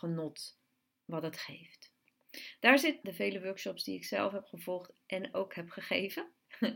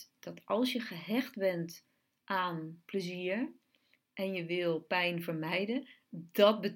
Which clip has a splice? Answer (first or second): first